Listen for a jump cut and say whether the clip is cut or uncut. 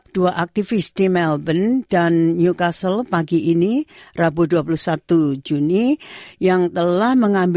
uncut